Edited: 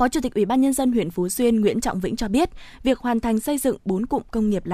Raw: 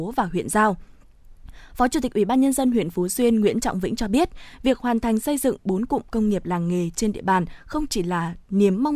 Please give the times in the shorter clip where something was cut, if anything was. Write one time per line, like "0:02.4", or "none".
none